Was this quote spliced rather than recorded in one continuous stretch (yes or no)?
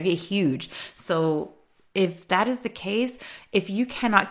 no